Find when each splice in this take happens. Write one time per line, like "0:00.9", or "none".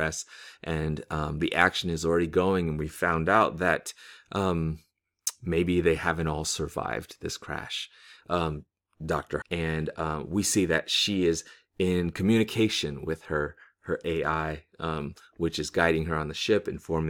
0:09.4